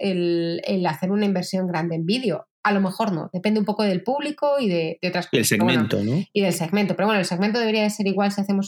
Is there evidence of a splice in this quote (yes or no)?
no